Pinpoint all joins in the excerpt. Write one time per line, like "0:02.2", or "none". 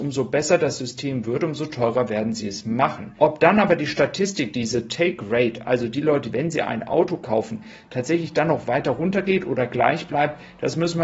0:03.2
0:06.3